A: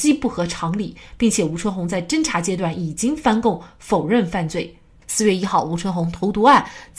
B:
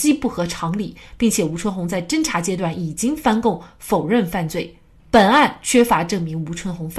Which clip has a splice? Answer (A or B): A